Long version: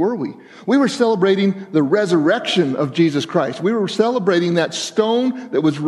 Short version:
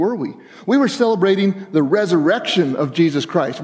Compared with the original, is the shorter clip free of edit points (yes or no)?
yes